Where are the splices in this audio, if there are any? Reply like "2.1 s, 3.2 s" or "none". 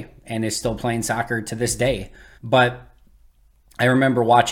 2.3 s